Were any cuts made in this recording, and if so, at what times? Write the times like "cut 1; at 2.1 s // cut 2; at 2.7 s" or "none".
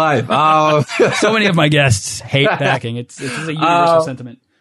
none